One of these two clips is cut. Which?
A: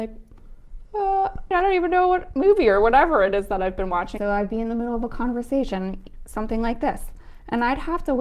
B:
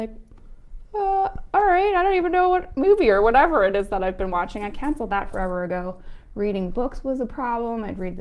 A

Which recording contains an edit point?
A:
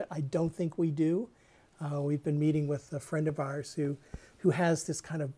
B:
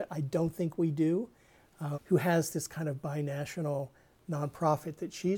B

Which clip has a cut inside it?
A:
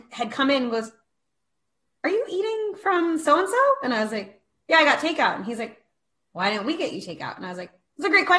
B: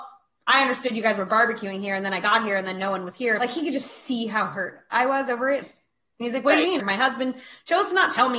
B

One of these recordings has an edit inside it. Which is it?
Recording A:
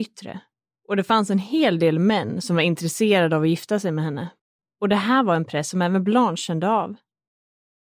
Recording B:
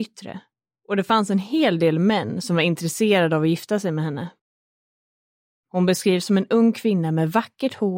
A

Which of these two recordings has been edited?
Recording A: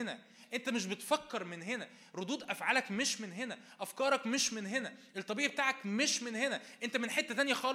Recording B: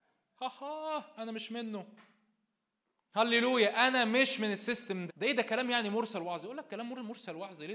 B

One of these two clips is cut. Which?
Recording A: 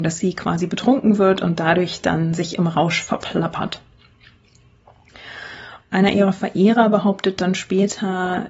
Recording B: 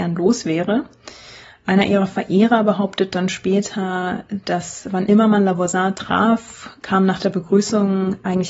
A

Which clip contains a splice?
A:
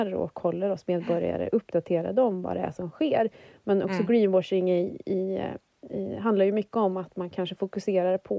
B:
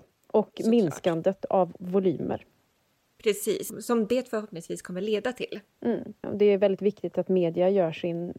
B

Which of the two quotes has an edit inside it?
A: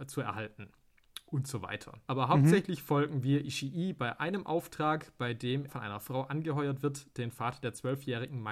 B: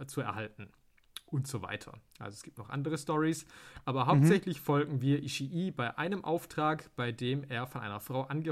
A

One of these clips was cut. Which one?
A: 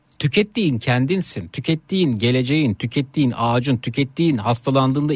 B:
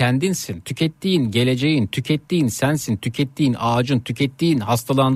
A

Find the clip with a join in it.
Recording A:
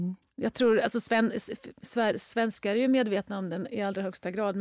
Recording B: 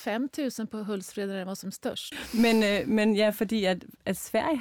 B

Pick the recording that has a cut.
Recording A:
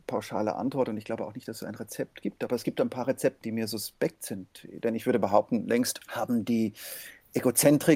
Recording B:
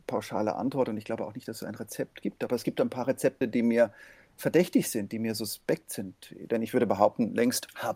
A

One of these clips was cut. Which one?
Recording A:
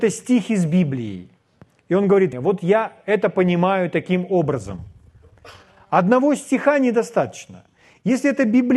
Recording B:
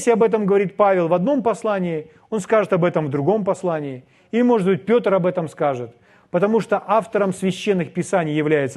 A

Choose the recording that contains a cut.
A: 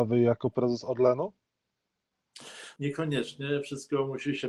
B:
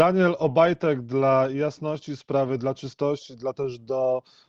A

